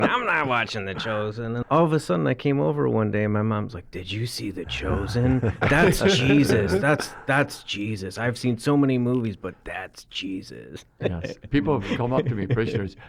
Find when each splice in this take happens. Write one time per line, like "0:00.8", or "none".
0:01.6